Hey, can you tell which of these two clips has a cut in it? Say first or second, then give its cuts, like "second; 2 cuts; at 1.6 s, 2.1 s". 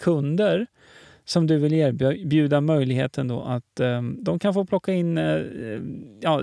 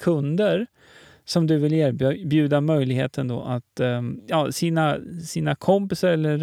second; 1 cut; at 4.2 s